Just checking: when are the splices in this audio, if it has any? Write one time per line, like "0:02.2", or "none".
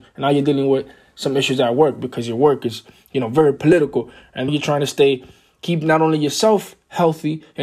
0:04.5